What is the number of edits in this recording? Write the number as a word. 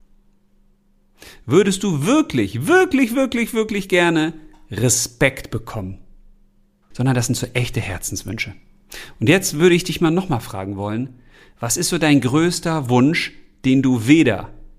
one